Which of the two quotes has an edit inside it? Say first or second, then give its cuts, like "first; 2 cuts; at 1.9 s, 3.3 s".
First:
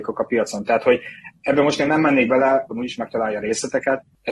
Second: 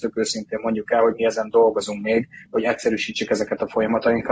first; 1 cut; at 2.7 s